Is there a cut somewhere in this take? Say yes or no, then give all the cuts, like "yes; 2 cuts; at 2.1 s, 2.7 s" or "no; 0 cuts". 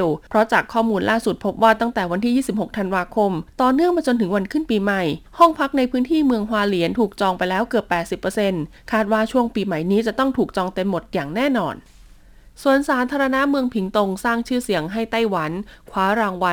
no; 0 cuts